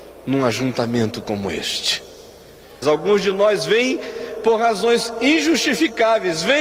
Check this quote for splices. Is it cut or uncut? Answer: cut